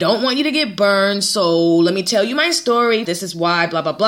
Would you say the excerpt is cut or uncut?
cut